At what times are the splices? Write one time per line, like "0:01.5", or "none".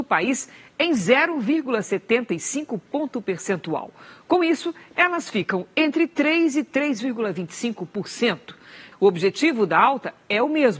0:08.9

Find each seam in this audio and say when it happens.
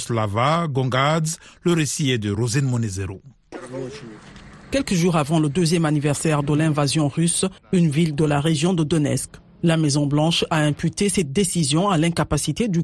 0:07.6

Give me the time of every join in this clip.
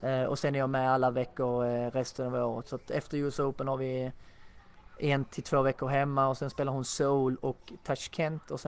none

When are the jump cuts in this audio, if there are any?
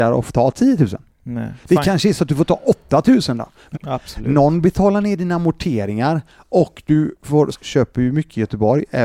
0:03.7
0:07.5

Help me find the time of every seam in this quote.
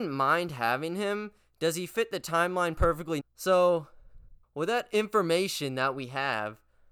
0:03.2
0:04.4

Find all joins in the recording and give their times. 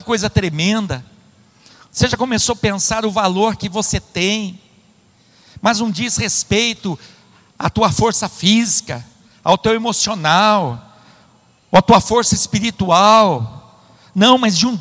none

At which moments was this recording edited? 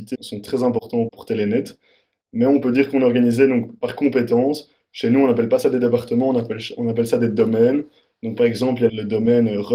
none

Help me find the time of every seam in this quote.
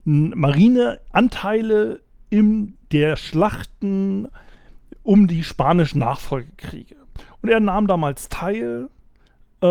none

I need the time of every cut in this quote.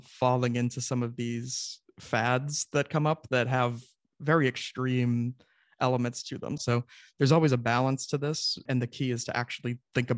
0:06.6

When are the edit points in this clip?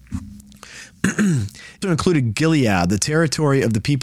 0:01.8

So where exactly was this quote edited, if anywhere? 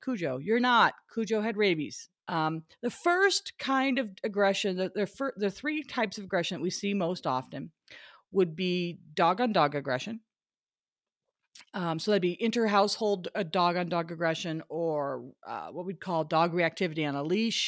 0:02.2

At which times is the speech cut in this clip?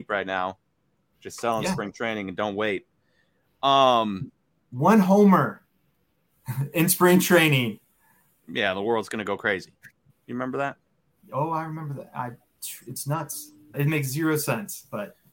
0:10.1
0:13.7

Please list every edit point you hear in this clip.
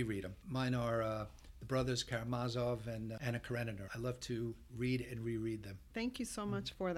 0:03.9

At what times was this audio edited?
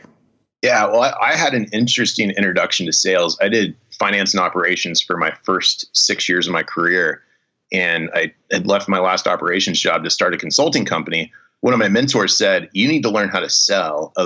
none

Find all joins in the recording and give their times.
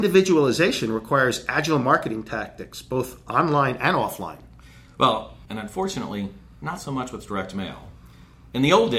0:05.5

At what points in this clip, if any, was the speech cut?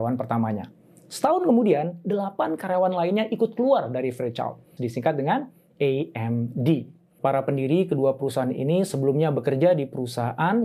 0:04.8
0:07.2

